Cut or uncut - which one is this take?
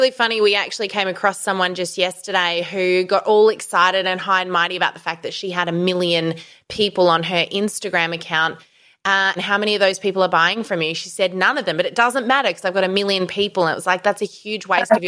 cut